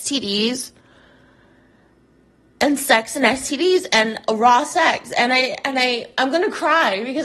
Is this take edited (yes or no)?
no